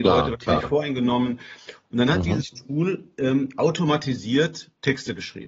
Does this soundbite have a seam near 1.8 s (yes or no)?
yes